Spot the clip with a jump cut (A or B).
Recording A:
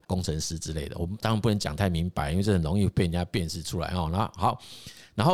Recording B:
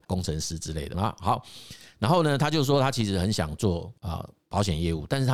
B